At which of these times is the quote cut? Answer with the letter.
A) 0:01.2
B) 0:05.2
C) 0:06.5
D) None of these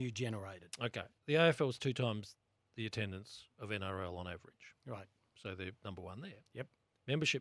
A